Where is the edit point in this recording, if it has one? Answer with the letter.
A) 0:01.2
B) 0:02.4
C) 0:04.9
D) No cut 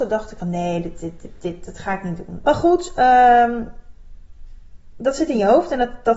B